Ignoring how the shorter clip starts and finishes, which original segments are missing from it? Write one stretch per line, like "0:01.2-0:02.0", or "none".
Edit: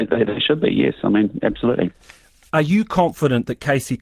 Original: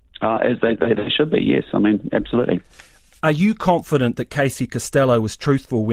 none